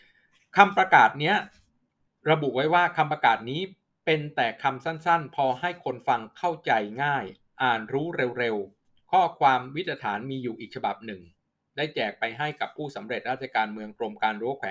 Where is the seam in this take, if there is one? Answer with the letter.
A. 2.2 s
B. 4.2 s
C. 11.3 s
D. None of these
D